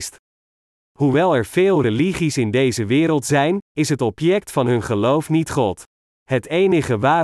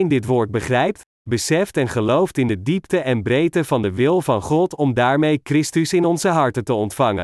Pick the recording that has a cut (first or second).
first